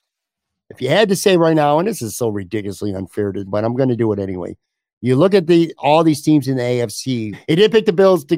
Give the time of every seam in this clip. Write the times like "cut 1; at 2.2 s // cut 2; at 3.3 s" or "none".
cut 1; at 3.5 s // cut 2; at 7.3 s